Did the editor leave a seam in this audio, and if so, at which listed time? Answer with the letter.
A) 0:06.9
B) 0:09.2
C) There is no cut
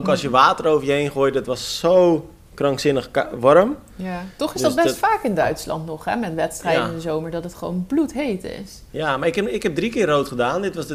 C